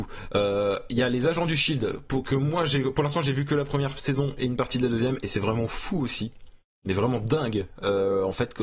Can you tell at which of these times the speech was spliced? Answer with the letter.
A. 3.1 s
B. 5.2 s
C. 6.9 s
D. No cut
D